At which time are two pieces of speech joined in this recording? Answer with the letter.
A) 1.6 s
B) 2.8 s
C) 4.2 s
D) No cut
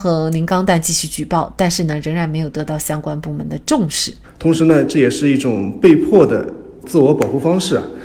C